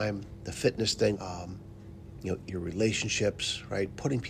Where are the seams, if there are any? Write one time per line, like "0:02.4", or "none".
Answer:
0:01.1
0:02.5